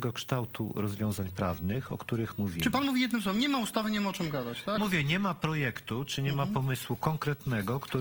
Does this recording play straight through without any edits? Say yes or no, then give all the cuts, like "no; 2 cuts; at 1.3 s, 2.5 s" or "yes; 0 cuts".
no; 1 cut; at 4.8 s